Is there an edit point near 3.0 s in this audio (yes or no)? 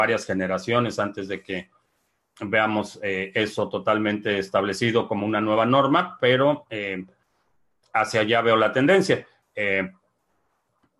no